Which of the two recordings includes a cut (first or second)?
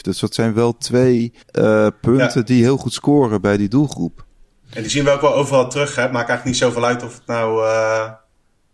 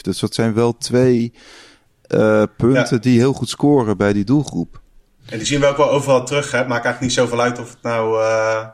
first